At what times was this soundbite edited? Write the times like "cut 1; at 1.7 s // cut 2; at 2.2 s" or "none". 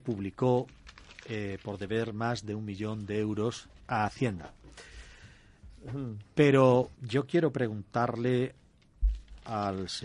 cut 1; at 5.7 s // cut 2; at 6.9 s